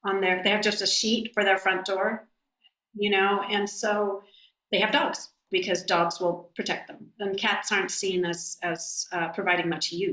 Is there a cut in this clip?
no; 0 cuts

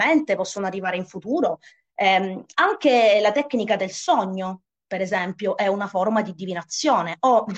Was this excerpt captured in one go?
yes; 0 cuts

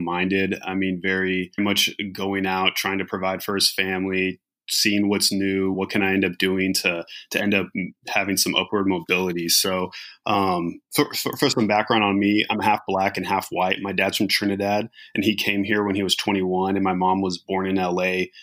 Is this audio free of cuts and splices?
no; 2 cuts; at 1.6 s, 5.7 s

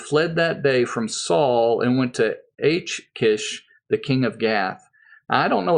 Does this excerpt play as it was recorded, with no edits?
yes; 0 cuts

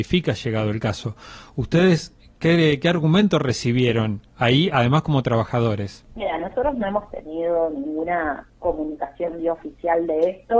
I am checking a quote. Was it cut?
no; 0 cuts

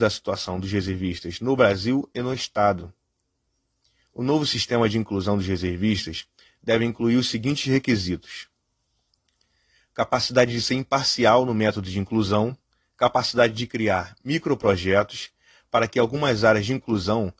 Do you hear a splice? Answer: no; 0 cuts

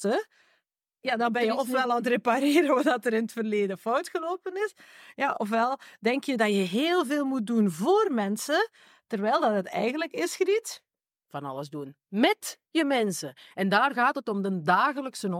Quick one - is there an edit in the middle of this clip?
no; 0 cuts

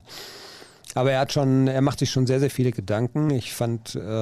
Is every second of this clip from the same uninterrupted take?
yes; 0 cuts

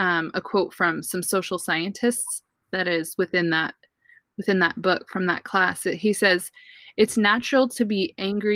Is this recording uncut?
yes; 0 cuts

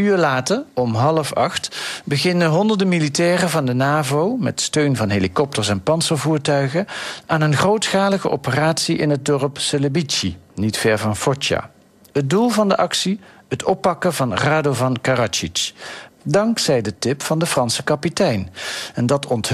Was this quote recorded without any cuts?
no; 1 cut; at 16.1 s

